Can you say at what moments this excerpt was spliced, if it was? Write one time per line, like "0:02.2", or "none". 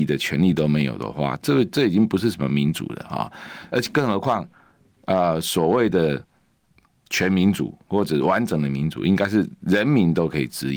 none